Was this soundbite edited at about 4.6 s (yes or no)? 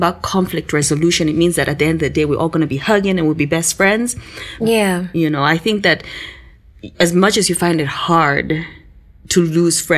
yes